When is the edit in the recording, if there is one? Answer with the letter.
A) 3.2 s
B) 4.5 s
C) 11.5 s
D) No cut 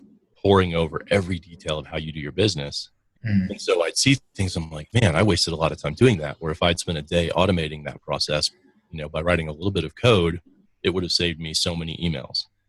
A